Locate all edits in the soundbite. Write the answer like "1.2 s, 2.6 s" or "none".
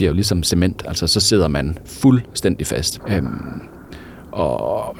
3.0 s